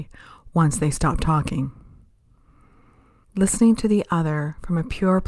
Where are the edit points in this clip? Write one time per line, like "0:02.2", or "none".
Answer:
0:03.2